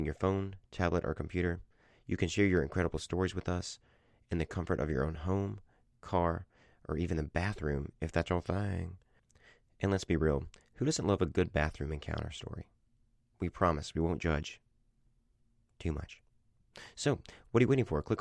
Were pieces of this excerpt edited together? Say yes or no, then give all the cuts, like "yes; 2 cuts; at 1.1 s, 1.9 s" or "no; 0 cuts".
no; 0 cuts